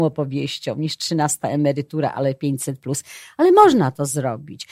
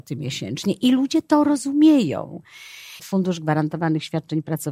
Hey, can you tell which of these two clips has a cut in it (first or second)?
second